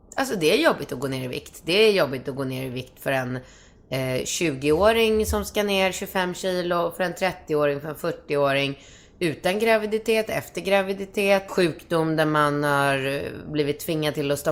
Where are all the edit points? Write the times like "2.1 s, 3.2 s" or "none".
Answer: 11.5 s

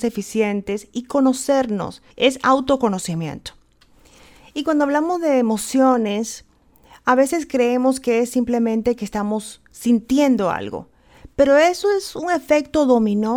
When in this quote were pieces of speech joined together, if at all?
2.1 s

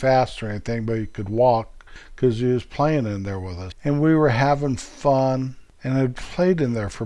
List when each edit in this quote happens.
3.7 s

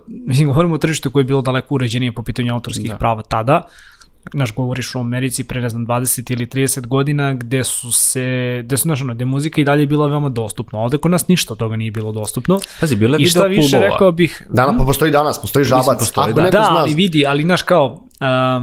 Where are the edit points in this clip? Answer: none

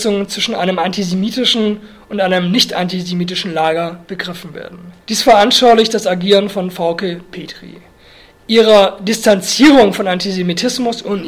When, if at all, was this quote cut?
5.0 s

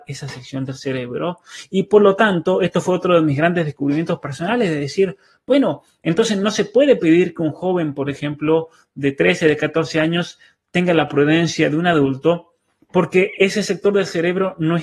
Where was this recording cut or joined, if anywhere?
none

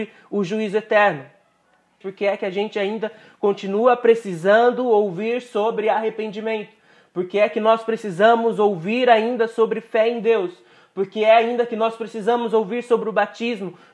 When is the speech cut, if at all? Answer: 2.0 s

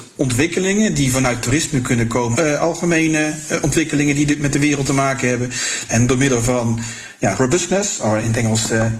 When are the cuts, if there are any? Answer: 2.3 s, 5.9 s, 7.3 s

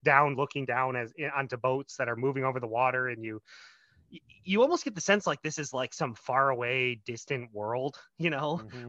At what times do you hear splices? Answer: none

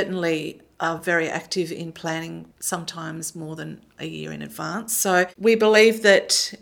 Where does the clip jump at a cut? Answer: none

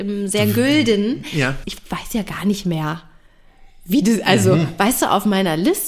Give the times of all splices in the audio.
1.6 s

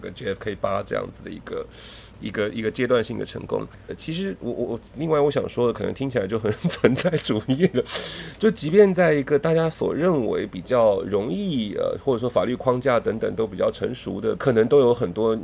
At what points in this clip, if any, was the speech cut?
3.9 s, 14.4 s

